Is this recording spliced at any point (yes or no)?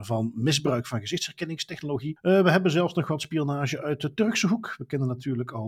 yes